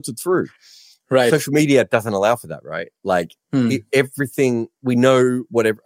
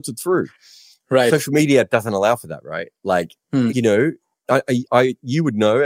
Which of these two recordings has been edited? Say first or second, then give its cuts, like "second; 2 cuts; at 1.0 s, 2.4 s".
second; 1 cut; at 3.7 s